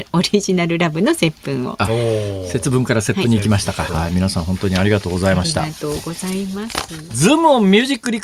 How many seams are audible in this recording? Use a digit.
1